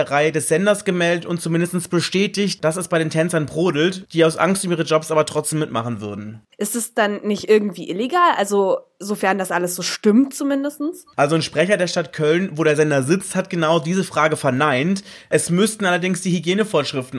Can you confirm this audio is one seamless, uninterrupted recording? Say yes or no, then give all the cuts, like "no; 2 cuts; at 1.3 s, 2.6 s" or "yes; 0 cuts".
no; 1 cut; at 6.5 s